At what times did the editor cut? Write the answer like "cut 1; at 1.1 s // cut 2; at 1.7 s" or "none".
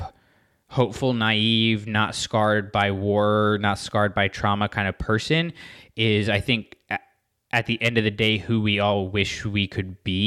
none

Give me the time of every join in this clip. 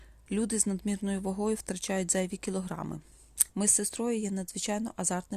cut 1; at 3.5 s

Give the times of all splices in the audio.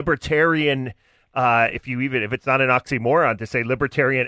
none

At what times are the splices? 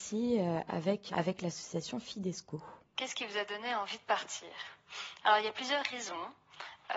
cut 1; at 1.1 s // cut 2; at 2.9 s

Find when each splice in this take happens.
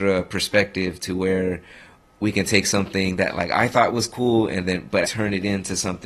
cut 1; at 5.0 s

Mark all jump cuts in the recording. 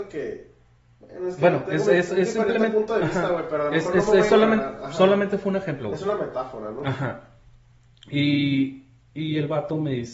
none

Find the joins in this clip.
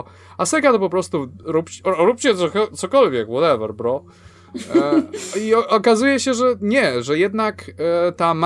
none

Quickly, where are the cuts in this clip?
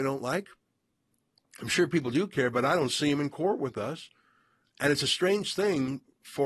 none

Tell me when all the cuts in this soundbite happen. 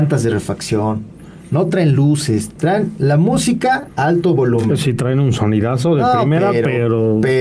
none

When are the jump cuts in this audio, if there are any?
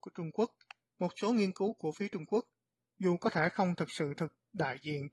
none

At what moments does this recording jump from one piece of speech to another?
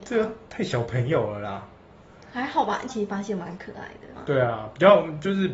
cut 1; at 2.9 s // cut 2; at 4.1 s

